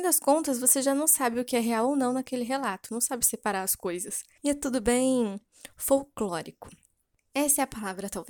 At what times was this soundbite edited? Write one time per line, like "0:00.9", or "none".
0:04.4